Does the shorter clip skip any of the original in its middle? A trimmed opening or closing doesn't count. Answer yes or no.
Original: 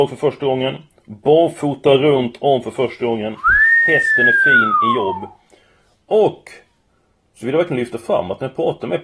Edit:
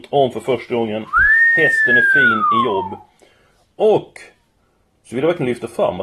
no